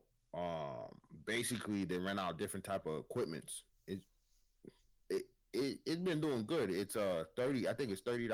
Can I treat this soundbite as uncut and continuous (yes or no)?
yes